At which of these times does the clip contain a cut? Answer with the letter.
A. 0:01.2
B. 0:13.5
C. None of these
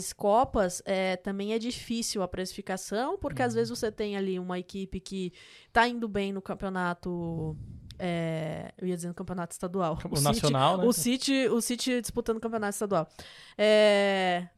C